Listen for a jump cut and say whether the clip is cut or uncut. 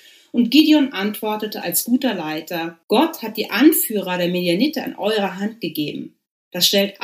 cut